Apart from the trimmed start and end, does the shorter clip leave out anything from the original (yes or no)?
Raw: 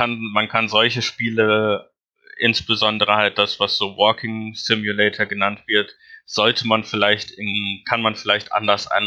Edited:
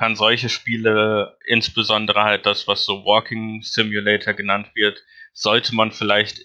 yes